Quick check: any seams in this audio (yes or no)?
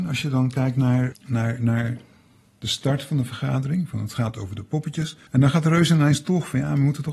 yes